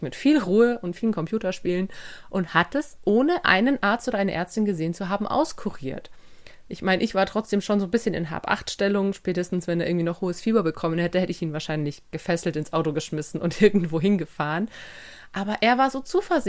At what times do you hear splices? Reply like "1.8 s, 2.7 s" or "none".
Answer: none